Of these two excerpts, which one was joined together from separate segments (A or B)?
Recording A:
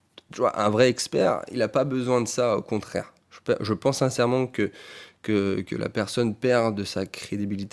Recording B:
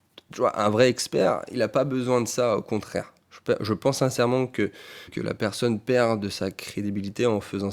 B